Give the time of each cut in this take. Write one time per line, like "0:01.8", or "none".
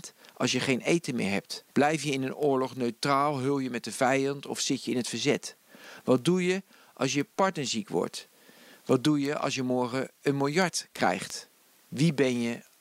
0:01.7

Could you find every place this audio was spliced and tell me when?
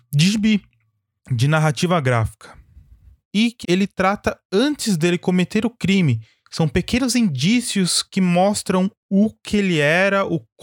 0:03.6

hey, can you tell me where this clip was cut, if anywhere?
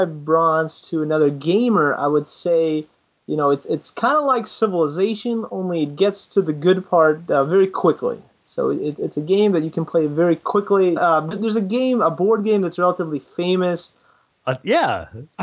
0:11.0
0:14.3

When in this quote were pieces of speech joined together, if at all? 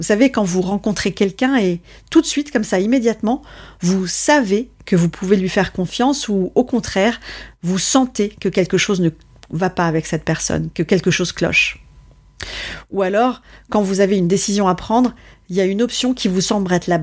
none

